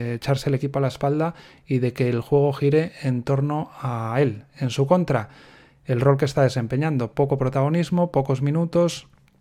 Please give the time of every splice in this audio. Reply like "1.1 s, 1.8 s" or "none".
none